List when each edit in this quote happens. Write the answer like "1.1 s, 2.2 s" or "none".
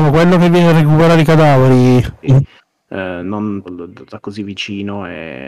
2.2 s, 3.6 s